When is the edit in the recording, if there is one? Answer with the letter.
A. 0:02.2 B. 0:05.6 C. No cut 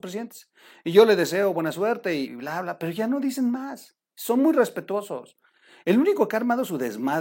A